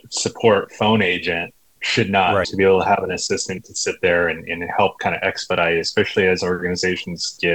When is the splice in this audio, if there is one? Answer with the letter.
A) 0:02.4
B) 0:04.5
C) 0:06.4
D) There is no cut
A